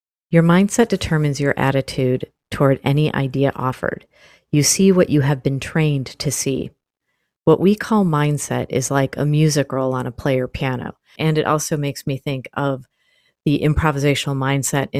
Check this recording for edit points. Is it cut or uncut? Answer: cut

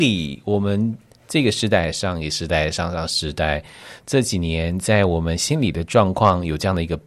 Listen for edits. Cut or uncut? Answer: uncut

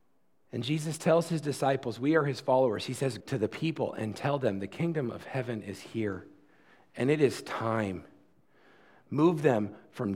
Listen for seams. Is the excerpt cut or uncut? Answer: cut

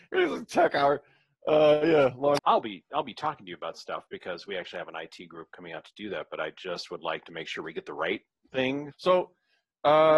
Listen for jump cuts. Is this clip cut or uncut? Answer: cut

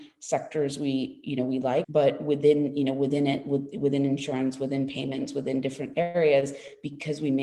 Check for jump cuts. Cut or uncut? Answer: cut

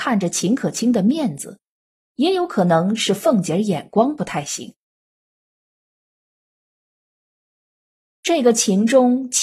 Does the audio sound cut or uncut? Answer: uncut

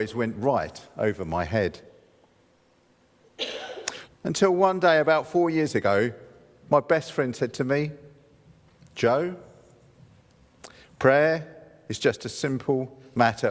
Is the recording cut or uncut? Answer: cut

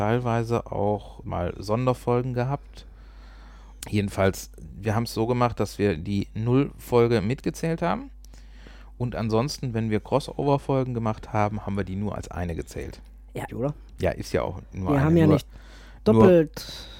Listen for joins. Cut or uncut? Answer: cut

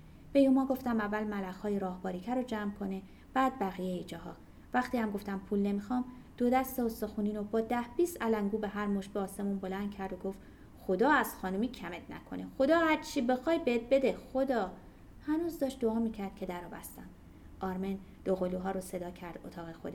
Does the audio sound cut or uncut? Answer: uncut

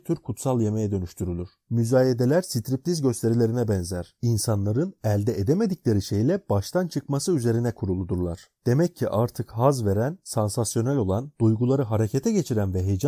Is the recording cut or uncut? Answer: uncut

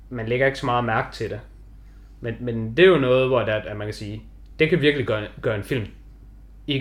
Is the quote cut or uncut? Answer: uncut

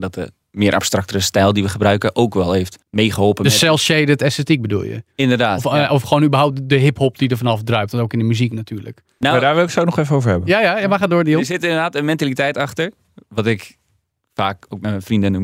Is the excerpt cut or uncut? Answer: cut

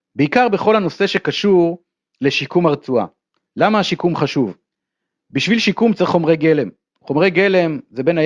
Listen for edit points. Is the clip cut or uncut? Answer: uncut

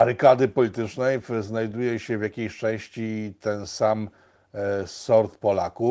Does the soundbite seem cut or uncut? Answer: uncut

